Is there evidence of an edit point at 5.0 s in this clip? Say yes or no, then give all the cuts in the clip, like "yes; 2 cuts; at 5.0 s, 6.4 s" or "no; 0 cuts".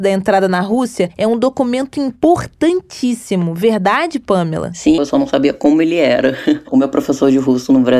yes; 1 cut; at 5.0 s